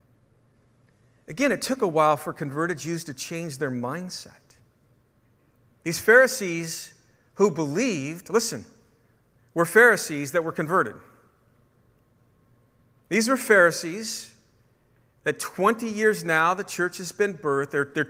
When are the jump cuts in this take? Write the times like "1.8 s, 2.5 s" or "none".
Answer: none